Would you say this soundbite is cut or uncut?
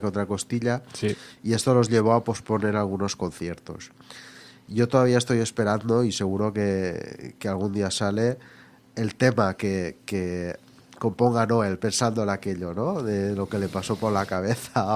uncut